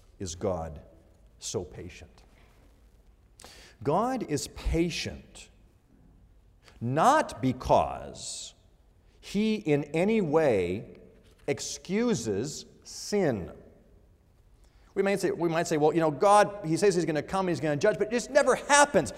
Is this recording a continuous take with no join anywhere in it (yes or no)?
yes